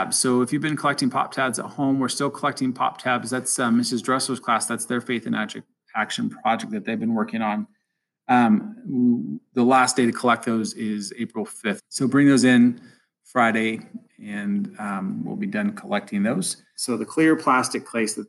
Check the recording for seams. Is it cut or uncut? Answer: cut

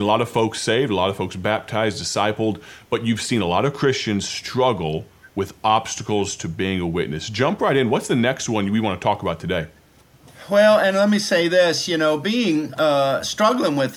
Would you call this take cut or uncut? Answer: uncut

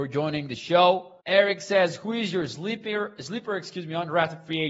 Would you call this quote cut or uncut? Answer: cut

